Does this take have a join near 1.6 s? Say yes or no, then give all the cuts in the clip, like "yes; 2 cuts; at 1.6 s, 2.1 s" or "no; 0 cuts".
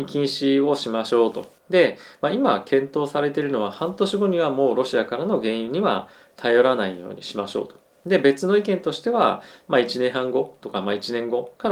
yes; 1 cut; at 1.6 s